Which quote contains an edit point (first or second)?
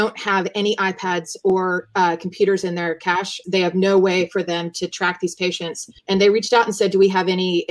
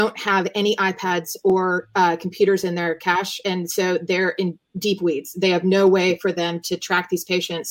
first